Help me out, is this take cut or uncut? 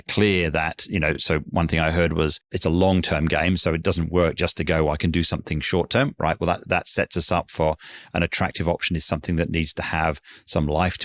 uncut